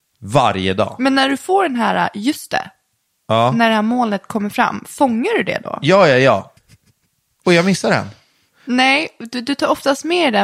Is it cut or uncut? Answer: cut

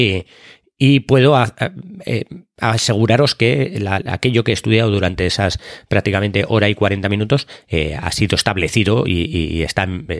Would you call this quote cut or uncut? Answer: cut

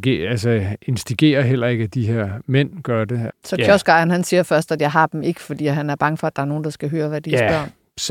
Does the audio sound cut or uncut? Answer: cut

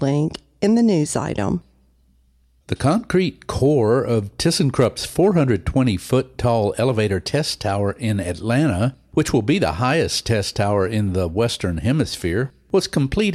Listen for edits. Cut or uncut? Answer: uncut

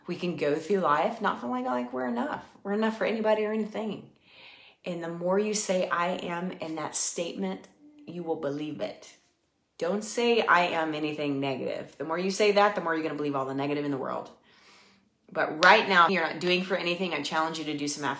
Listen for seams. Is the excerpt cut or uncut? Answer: cut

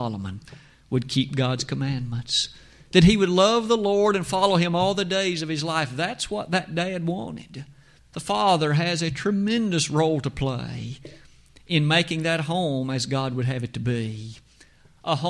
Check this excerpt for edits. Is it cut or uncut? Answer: cut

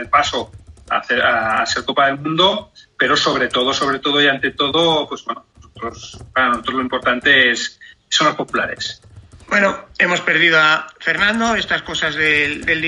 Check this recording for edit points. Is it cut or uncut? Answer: uncut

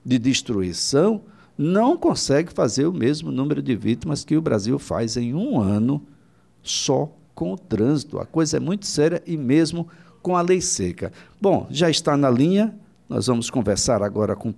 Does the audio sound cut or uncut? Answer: uncut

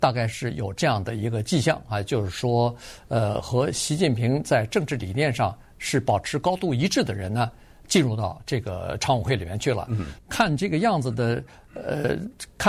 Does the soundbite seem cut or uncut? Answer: cut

